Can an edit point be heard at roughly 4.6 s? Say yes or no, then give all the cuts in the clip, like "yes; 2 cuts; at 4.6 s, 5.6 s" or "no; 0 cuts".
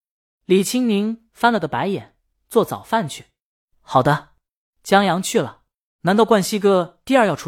no; 1 cut; at 6.0 s